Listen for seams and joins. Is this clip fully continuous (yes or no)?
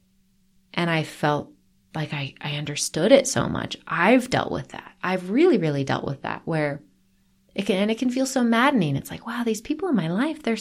yes